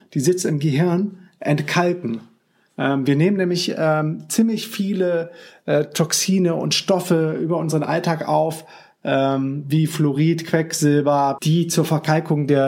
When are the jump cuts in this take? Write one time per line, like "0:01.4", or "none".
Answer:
0:11.4